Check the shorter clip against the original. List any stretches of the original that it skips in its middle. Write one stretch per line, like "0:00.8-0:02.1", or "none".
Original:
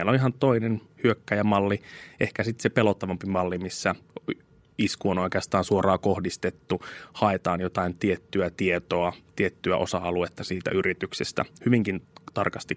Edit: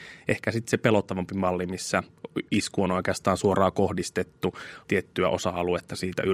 0:04.4-0:04.7
0:07.1-0:09.3